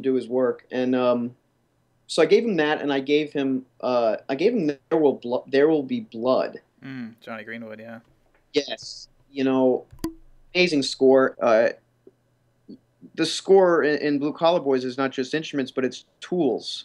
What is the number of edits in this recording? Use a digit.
1